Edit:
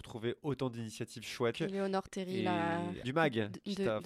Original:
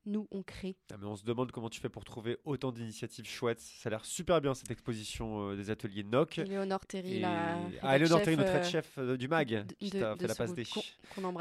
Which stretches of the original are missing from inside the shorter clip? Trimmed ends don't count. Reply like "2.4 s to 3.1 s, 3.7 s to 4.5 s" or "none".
3.6 s to 6.3 s, 7.8 s to 9.2 s